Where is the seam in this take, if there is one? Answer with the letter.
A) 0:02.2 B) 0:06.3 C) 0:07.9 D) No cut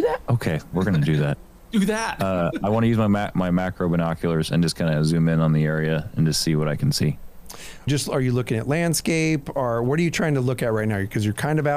C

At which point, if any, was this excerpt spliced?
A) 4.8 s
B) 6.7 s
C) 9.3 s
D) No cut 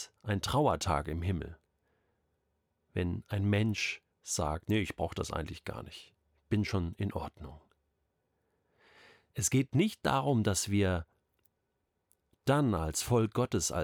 D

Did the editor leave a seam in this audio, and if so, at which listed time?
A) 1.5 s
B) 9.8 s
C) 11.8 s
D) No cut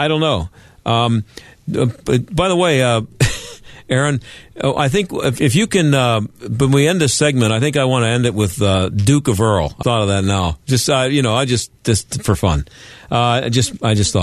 B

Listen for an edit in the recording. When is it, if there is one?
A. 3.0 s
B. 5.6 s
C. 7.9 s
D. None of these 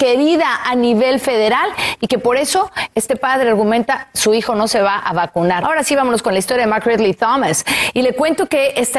B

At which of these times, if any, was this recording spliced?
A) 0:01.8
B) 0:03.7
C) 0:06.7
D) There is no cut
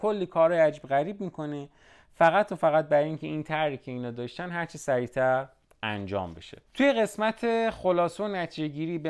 C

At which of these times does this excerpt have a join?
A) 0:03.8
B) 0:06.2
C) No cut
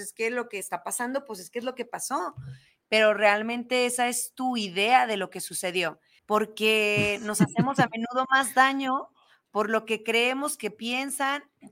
B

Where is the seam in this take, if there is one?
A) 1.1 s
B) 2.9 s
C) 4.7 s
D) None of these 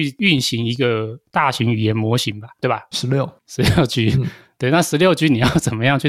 B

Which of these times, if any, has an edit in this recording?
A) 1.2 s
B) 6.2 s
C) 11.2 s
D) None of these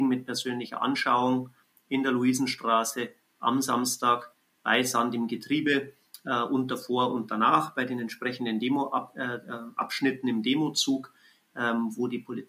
D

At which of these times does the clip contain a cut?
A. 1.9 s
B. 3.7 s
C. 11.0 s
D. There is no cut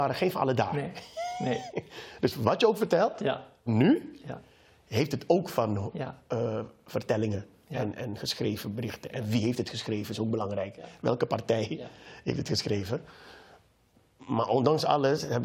B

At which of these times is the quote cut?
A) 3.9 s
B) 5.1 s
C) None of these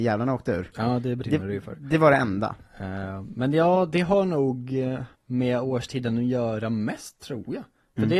B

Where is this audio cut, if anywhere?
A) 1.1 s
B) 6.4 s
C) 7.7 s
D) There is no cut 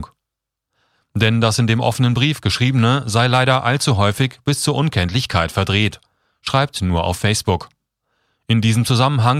D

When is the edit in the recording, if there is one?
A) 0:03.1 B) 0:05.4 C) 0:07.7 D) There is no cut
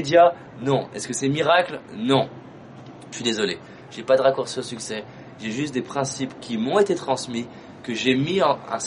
D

